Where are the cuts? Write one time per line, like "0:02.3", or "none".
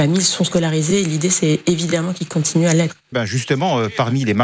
0:03.1